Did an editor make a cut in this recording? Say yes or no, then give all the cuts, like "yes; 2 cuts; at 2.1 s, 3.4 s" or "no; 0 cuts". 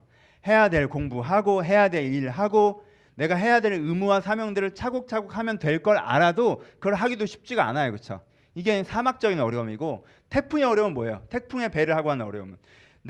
no; 0 cuts